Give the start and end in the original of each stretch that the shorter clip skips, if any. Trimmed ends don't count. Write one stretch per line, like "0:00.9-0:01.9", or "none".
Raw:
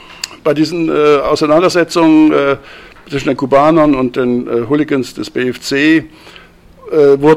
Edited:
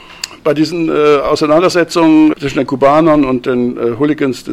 0:02.3-0:03.0